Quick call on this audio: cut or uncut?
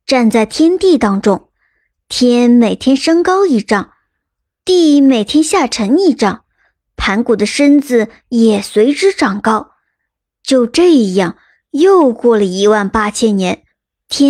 uncut